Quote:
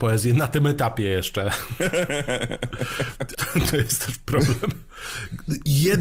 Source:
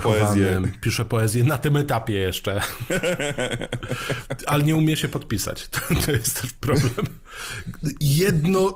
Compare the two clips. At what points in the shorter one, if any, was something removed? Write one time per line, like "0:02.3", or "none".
0:03.3